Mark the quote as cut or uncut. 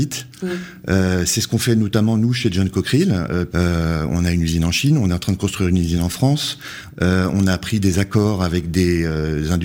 cut